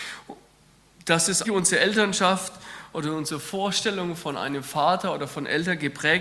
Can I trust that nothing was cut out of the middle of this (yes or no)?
no